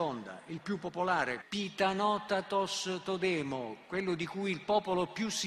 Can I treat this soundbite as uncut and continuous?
no; 1 cut; at 1.4 s

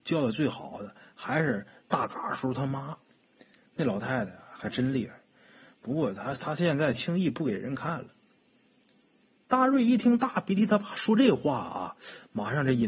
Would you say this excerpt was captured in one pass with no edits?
yes; 0 cuts

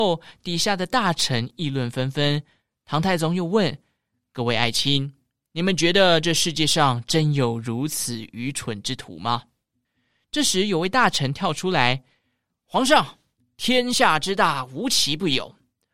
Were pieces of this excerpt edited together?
no; 0 cuts

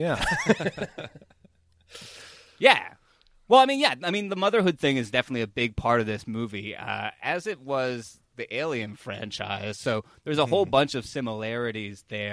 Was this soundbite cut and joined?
no; 0 cuts

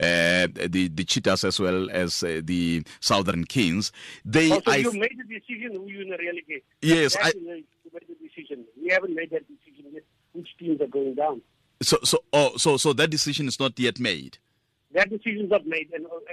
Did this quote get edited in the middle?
no; 0 cuts

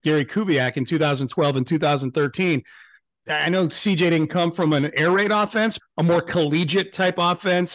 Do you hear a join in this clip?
yes; 2 cuts; at 3.2 s, 5.8 s

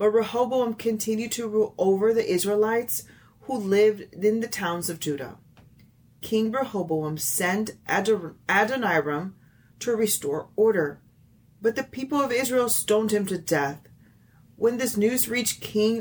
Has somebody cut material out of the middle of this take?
yes; 1 cut; at 9.7 s

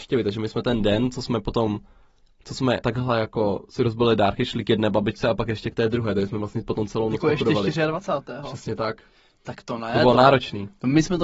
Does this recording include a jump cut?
yes; 1 cut; at 2.8 s

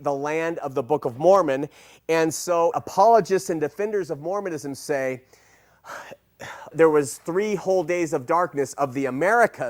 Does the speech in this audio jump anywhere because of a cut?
yes; 2 cuts; at 2.7 s, 6.7 s

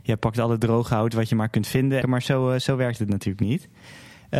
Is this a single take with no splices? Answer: no; 1 cut; at 2.0 s

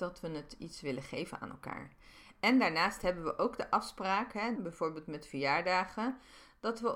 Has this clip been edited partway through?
yes; 1 cut; at 4.6 s

